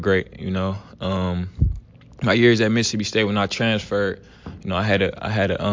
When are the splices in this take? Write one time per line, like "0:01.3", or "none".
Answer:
none

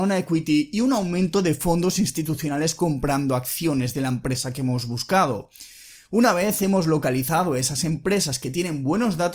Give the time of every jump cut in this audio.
none

